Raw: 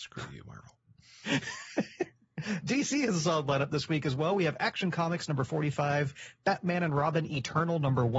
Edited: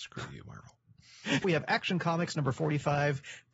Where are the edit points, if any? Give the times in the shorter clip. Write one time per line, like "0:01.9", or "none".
0:01.4